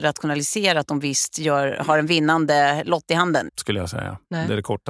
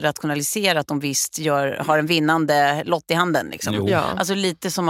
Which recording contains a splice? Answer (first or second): first